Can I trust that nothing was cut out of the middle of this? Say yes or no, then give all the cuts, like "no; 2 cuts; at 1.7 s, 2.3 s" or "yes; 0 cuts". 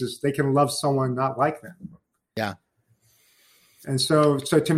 yes; 0 cuts